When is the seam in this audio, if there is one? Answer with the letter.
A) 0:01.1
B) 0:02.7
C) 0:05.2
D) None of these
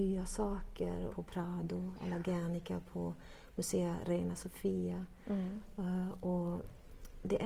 A